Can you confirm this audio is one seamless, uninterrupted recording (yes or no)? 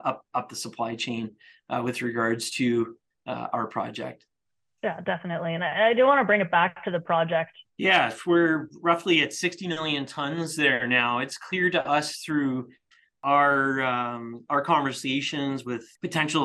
no